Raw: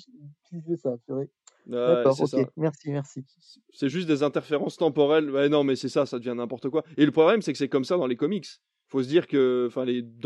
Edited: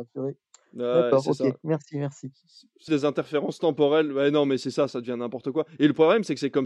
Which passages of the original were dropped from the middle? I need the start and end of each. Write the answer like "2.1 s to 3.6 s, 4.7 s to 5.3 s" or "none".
3.8 s to 4.1 s